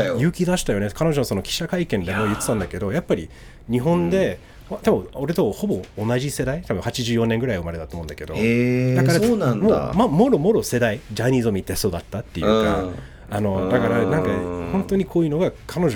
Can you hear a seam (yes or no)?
no